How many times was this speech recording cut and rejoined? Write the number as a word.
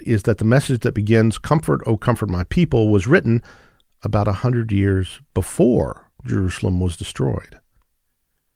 zero